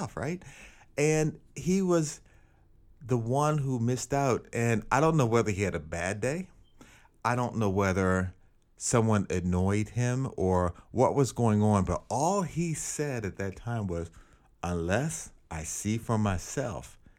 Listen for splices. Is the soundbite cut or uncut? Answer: uncut